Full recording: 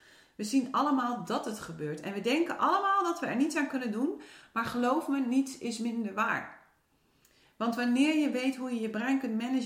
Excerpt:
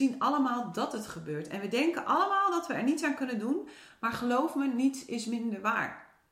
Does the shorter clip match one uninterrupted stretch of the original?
yes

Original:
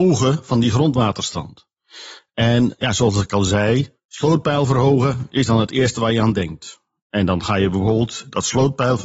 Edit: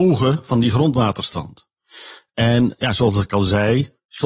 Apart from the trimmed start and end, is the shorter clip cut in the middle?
no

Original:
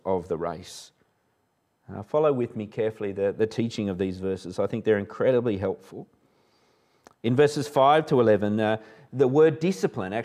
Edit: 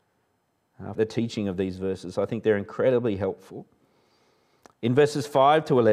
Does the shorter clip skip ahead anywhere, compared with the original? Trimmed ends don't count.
yes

